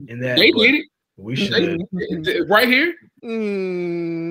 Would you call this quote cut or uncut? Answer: cut